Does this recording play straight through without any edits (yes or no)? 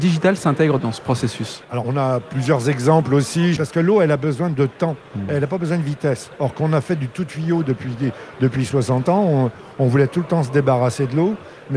no